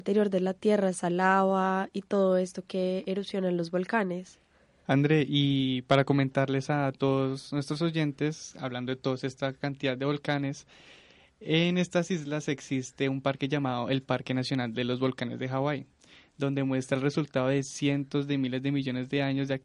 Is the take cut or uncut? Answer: uncut